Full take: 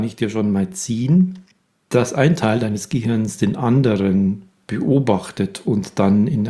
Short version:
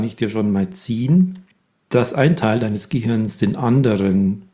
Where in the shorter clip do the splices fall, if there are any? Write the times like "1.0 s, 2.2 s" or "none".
none